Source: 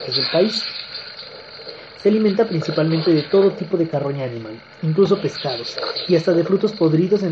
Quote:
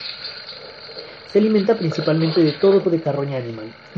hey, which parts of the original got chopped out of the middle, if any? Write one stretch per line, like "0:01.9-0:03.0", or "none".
0:03.5-0:03.7